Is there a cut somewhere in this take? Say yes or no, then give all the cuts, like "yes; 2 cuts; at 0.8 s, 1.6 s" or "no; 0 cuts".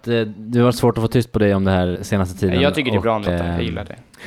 yes; 2 cuts; at 2.0 s, 3.3 s